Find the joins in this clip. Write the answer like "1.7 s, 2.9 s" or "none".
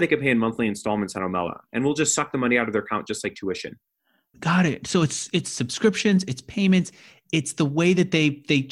4.3 s